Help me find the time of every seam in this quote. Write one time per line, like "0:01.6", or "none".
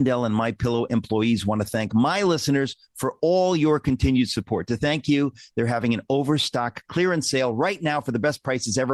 none